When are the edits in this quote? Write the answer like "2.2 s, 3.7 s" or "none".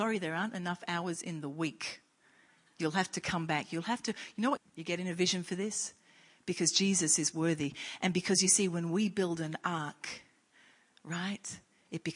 4.6 s